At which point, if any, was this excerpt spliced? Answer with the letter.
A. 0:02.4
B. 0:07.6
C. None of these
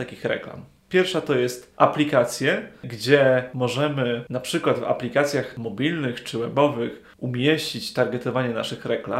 C